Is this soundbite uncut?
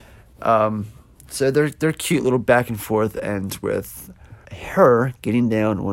no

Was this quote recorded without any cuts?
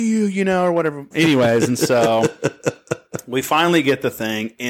no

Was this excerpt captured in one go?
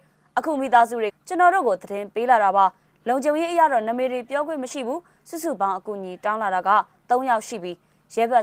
no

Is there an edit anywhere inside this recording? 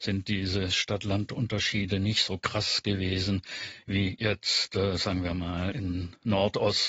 yes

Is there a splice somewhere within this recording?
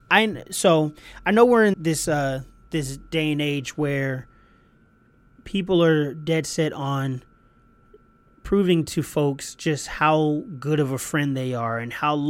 yes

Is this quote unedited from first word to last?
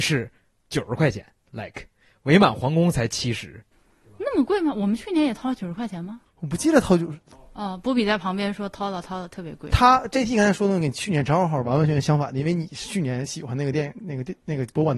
yes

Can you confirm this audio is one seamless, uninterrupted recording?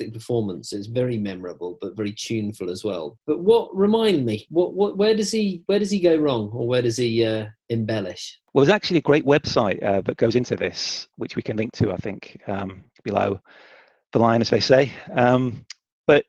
yes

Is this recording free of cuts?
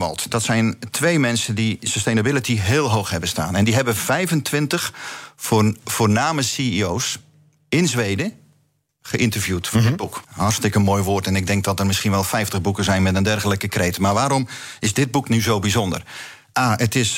no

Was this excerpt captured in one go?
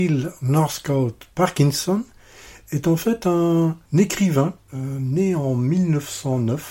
no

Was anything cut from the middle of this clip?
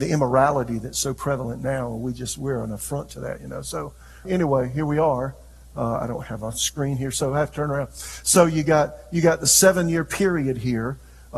yes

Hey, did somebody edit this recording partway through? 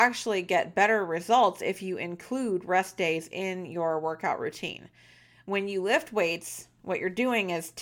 no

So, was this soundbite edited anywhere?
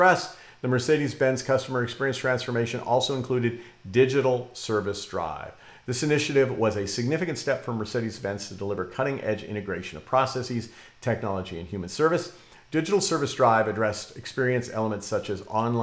no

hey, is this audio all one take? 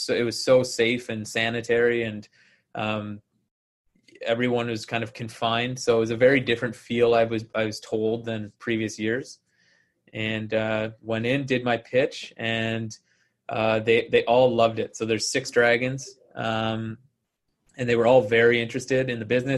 yes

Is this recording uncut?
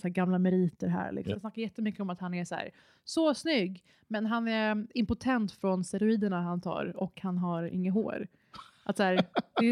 no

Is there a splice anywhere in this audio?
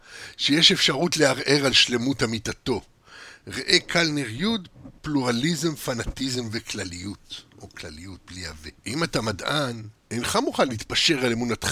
yes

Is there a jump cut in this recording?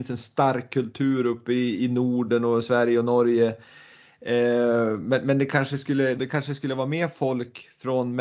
yes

